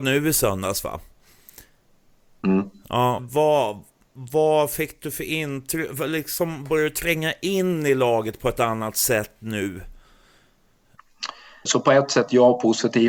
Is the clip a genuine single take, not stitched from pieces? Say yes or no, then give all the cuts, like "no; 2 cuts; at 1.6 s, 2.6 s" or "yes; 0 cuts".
no; 2 cuts; at 3.2 s, 11.7 s